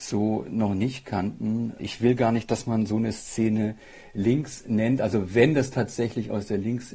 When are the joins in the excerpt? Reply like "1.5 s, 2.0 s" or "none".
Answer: 1.8 s